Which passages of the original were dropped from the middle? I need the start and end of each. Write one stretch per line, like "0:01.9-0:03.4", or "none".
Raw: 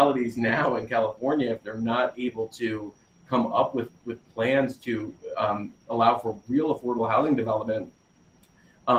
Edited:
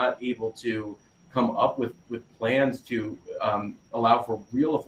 none